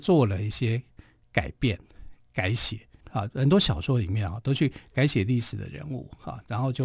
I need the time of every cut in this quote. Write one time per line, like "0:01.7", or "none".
0:03.0